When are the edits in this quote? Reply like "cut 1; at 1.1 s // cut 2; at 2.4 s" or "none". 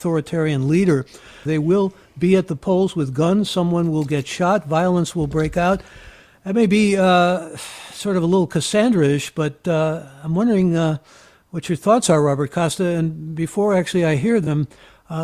cut 1; at 1.5 s